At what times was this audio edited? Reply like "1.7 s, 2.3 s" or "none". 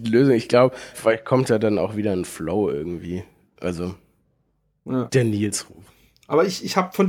0.9 s